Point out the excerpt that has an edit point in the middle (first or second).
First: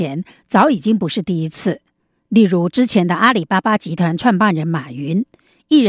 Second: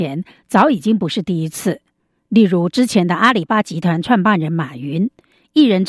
second